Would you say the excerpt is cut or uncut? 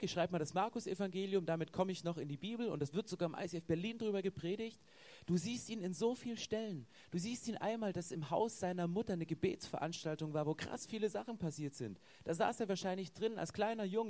uncut